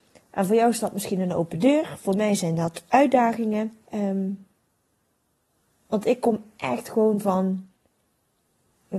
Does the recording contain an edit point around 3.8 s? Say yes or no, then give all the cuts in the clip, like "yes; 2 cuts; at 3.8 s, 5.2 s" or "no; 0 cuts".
yes; 1 cut; at 3.8 s